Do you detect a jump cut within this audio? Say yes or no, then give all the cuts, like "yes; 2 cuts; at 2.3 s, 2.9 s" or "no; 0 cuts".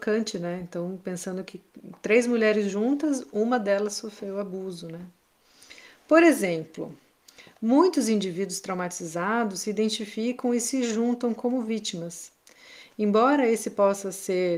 no; 0 cuts